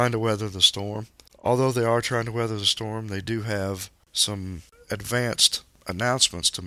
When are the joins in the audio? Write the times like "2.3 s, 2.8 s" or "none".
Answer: none